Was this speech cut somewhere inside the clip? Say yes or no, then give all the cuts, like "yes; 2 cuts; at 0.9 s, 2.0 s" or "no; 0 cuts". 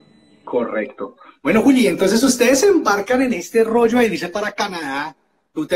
no; 0 cuts